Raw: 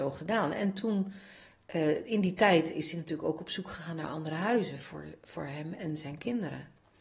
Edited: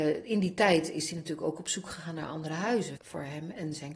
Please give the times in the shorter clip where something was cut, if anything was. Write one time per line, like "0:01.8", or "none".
0:03.0